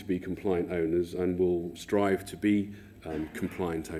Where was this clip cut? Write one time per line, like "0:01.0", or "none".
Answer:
0:01.7

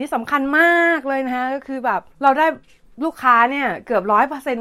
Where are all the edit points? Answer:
0:02.1

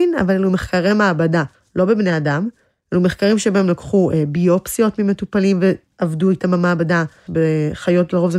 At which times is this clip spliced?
0:07.3

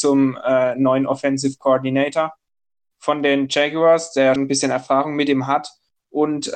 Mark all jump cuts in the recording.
0:04.4

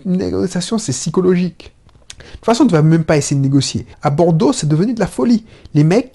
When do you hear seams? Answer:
0:03.9

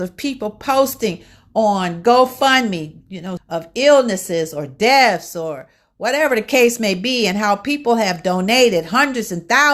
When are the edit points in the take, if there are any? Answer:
0:03.4

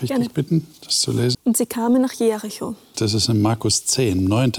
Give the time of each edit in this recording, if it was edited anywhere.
0:01.3
0:02.9

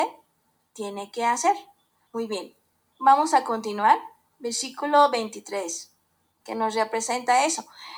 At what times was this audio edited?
0:02.1
0:06.4

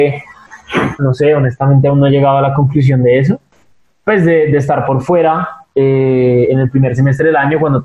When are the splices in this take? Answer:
0:01.0

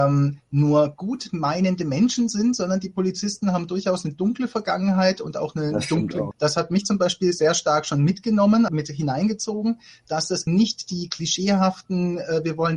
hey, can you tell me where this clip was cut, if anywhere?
0:06.3
0:08.7
0:10.5

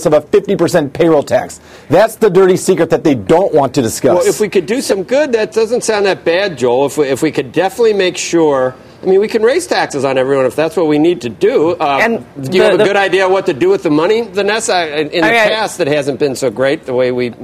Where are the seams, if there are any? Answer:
none

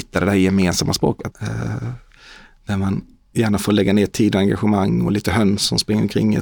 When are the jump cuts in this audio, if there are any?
0:01.3

